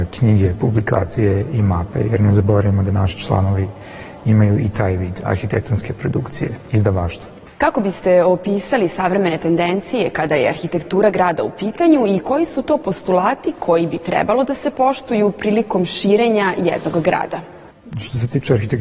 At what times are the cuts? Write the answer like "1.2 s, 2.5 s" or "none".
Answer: none